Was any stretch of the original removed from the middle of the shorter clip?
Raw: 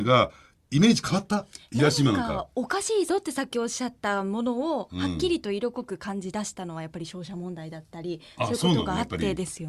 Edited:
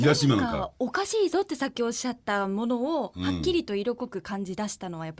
no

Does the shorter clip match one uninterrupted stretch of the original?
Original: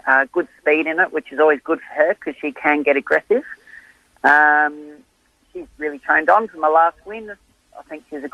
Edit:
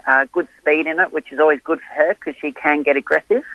yes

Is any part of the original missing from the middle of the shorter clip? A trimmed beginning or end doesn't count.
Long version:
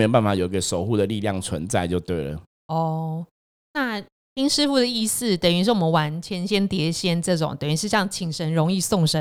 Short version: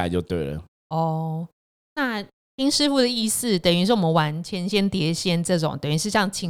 no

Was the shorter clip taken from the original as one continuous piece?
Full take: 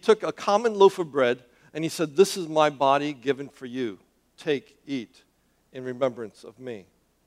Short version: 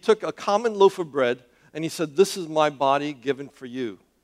yes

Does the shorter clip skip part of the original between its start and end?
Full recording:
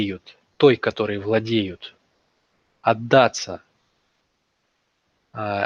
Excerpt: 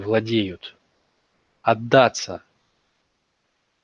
no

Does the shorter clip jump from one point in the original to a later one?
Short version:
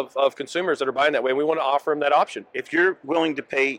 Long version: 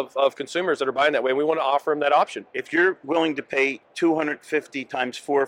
no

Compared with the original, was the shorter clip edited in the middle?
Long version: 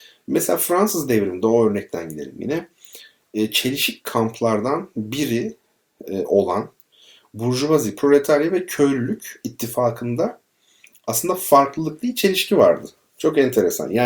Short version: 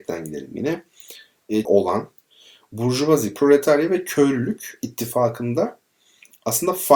yes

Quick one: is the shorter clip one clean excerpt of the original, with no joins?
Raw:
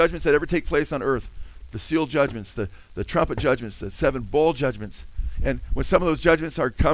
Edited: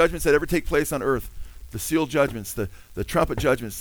yes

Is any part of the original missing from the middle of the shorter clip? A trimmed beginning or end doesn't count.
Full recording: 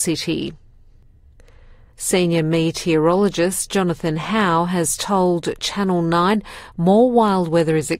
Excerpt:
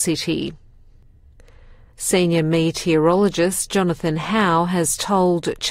no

